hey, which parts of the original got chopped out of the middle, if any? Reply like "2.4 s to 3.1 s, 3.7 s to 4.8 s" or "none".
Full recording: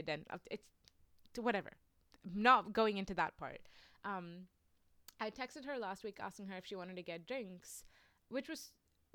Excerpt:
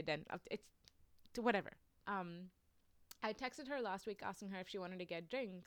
2.0 s to 4.0 s